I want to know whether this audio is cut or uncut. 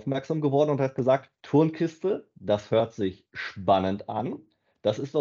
cut